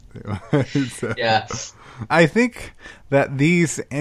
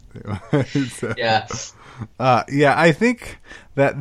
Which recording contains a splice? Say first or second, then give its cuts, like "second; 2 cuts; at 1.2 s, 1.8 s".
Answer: first; 1 cut; at 2.1 s